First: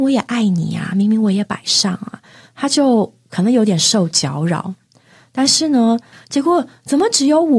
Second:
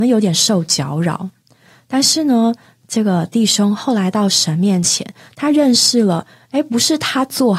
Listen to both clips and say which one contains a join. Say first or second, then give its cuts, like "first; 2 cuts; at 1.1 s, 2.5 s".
first; 1 cut; at 6.1 s